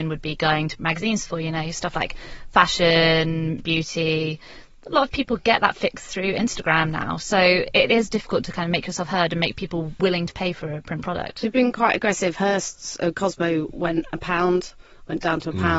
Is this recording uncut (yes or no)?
yes